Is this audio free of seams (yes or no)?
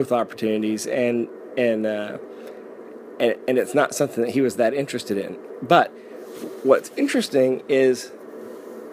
yes